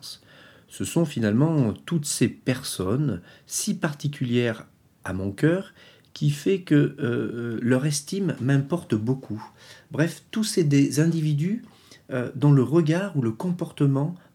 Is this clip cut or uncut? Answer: uncut